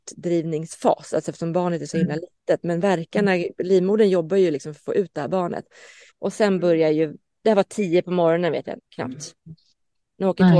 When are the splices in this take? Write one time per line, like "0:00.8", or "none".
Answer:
0:06.1
0:08.8

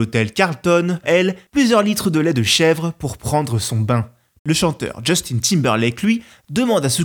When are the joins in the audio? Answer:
0:01.0
0:04.4

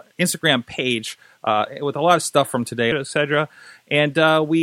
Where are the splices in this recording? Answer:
0:02.9

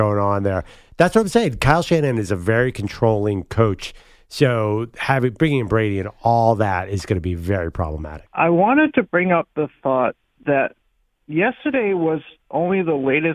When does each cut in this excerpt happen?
0:08.3

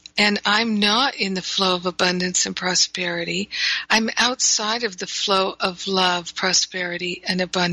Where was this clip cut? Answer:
0:03.9

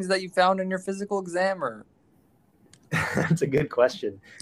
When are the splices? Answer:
none

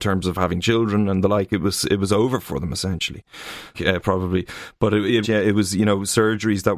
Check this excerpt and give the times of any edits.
0:03.7
0:05.2

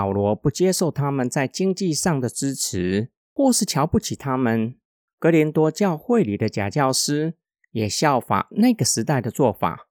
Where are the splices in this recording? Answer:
0:03.2
0:05.1

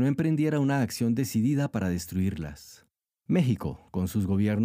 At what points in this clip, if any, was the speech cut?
0:03.2

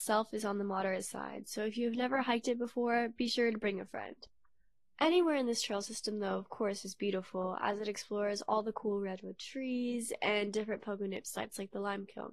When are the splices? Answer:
none

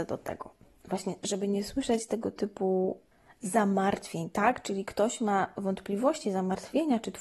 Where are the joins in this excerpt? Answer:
none

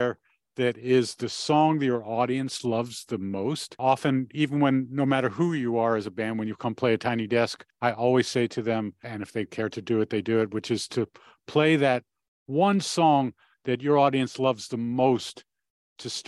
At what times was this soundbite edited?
none

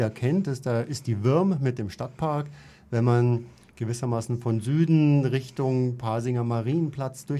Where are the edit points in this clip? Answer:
none

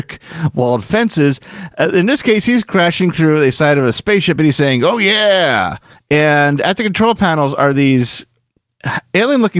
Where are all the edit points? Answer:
none

